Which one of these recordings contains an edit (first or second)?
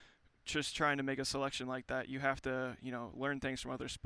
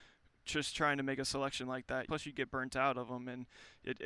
second